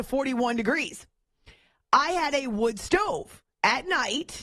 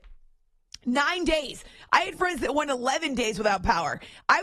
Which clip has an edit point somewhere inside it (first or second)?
first